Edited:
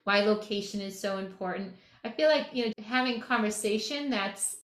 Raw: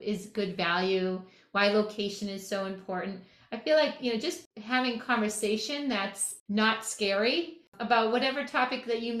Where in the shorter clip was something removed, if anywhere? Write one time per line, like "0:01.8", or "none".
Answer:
0:02.7